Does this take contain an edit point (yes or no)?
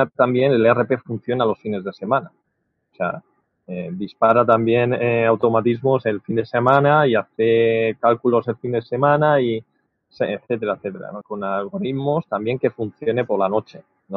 yes